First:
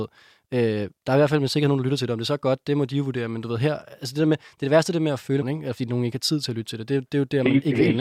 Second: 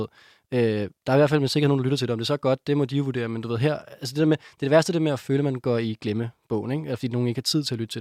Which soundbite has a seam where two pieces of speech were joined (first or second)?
first